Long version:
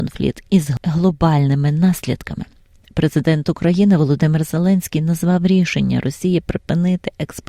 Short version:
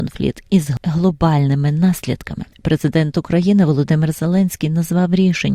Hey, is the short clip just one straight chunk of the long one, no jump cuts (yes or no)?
no